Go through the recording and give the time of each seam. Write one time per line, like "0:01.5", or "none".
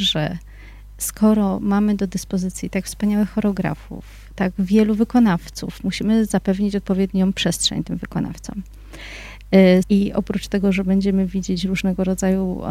0:09.8